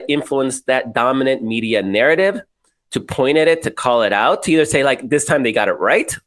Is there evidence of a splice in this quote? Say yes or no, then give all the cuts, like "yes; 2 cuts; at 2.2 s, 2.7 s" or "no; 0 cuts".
no; 0 cuts